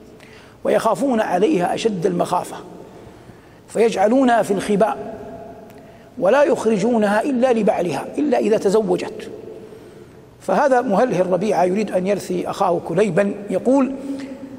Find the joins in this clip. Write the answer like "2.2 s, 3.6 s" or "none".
none

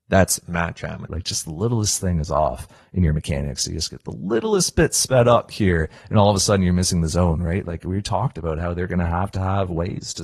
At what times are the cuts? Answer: 1.1 s

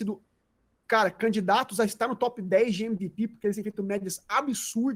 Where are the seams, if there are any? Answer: none

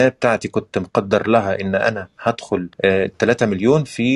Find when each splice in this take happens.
2.7 s

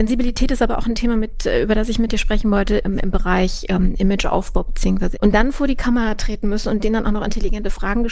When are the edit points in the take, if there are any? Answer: 5.1 s

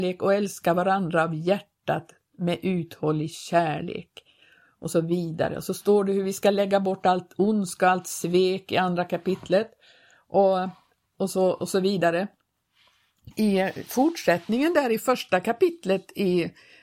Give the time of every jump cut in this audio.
13.3 s

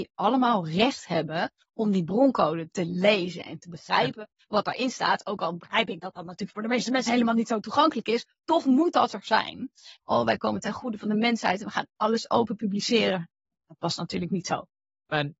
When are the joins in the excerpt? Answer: 10.0 s

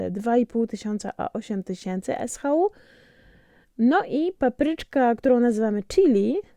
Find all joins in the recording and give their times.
none

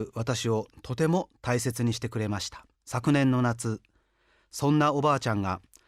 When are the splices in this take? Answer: 2.7 s

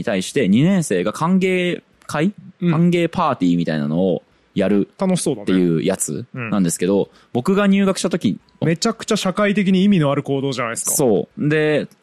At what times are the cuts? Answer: 8.6 s

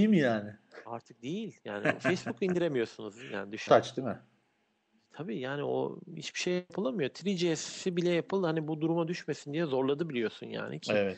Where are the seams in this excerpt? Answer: 3.7 s

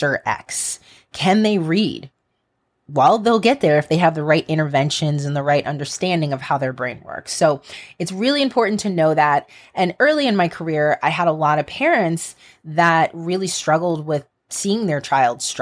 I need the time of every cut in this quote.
none

